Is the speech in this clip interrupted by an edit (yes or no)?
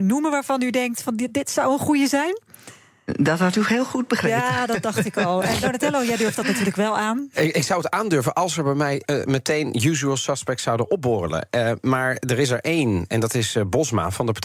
no